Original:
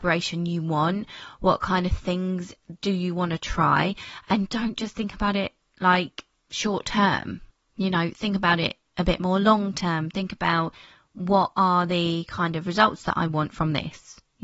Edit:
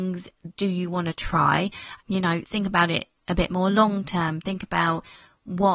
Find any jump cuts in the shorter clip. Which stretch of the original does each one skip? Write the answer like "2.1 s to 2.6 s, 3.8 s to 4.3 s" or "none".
4.3 s to 7.7 s